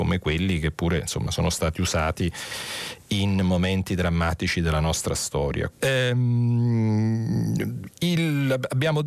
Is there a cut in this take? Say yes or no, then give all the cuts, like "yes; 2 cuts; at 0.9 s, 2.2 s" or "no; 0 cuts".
yes; 1 cut; at 5.7 s